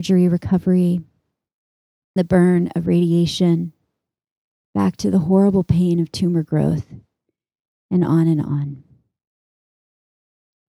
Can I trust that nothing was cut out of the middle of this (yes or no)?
no